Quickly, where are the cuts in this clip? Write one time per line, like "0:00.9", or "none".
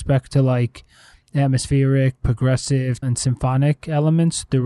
0:03.0